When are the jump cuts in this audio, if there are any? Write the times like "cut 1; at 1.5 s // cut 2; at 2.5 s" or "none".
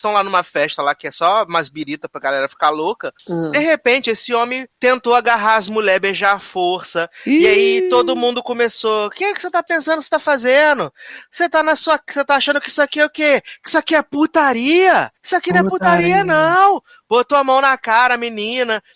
none

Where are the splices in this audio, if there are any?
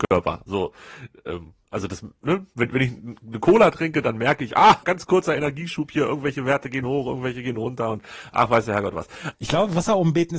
cut 1; at 4.8 s // cut 2; at 9.3 s

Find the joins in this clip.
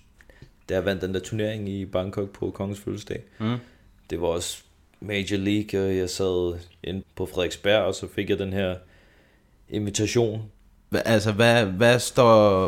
cut 1; at 7.0 s // cut 2; at 10.9 s

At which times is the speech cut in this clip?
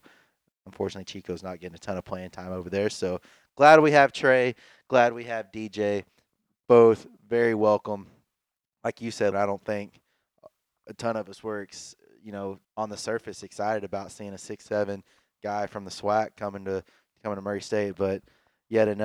cut 1; at 9.3 s // cut 2; at 12.6 s

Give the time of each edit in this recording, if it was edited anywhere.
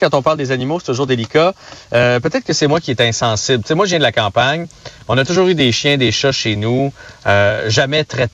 none

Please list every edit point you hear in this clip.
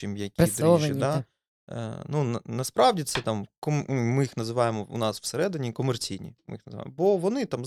none

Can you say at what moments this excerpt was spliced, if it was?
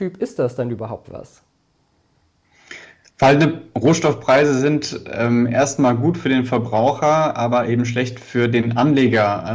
none

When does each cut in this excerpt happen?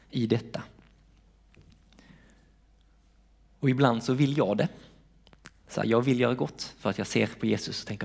none

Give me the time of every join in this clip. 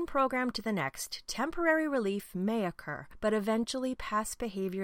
none

